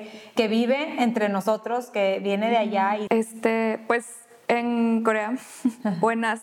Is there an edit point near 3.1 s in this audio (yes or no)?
yes